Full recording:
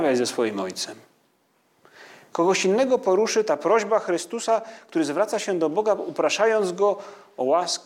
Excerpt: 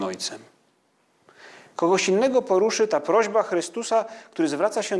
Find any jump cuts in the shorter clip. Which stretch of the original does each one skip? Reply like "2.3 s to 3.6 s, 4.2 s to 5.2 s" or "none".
none